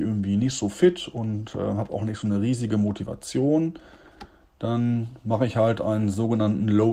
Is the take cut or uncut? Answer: uncut